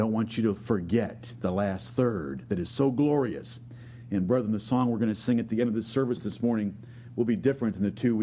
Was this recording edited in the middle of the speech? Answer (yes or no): no